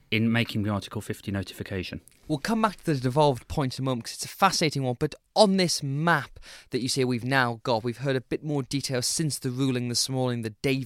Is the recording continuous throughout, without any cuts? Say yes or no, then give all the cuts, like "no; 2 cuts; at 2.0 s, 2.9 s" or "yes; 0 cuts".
yes; 0 cuts